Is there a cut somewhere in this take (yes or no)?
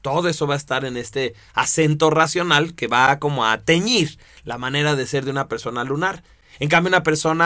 no